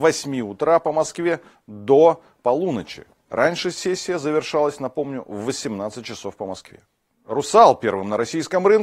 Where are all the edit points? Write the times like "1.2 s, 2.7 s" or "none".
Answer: none